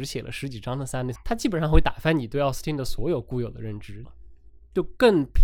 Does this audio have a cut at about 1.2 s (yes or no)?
yes